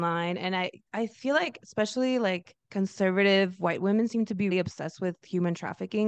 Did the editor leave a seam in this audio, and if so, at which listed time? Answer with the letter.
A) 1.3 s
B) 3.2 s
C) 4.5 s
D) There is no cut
C